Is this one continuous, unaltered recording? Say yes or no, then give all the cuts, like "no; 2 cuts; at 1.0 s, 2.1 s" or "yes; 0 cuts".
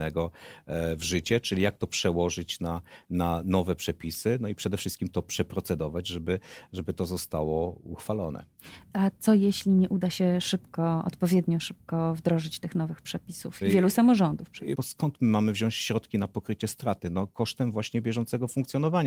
no; 2 cuts; at 13.6 s, 14.7 s